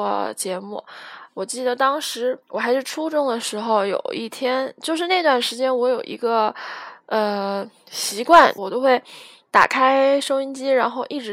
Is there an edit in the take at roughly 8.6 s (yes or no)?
yes